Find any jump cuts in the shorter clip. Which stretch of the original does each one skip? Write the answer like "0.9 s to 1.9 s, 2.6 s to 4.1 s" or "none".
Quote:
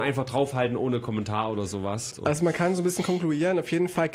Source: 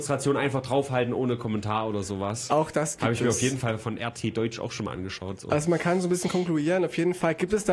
2.5 s to 5.4 s